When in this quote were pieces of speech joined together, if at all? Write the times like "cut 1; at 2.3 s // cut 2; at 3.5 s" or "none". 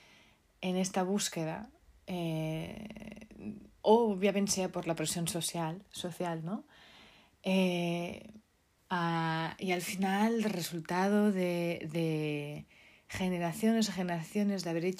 cut 1; at 3.8 s // cut 2; at 8.8 s